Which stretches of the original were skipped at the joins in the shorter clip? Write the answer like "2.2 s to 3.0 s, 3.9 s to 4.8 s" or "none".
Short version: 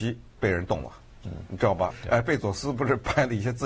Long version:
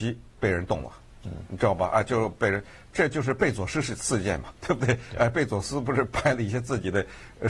1.9 s to 5.0 s